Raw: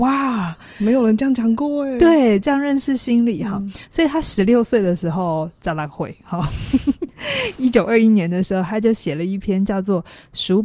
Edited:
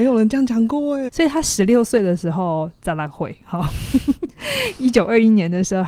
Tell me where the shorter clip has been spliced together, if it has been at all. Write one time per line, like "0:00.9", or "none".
0:01.1